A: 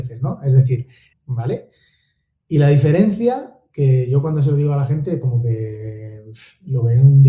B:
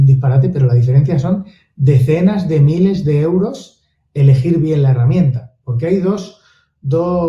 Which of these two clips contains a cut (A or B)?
A